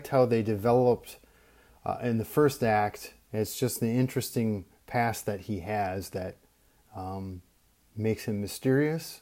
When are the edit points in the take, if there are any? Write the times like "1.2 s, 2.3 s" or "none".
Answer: 3.3 s